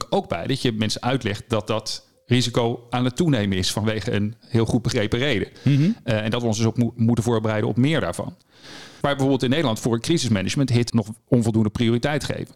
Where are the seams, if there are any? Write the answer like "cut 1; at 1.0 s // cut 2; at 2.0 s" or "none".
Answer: cut 1; at 9.0 s // cut 2; at 10.9 s